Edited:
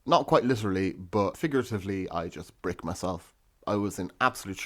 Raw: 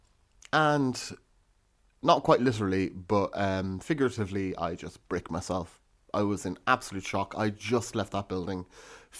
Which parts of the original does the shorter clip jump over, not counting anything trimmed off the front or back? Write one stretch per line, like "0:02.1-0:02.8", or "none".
0:03.3-0:03.8